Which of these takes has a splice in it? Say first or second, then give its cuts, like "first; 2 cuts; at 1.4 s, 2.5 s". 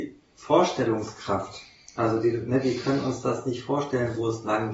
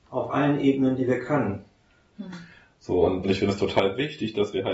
second; 2 cuts; at 2.1 s, 3.2 s